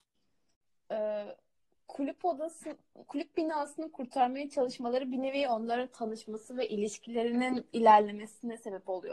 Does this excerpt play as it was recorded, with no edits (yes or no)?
no